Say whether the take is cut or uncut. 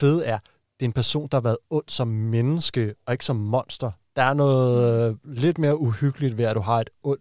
uncut